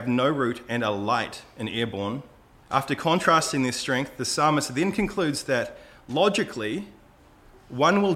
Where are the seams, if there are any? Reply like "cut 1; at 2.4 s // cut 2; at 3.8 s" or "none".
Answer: cut 1; at 2.6 s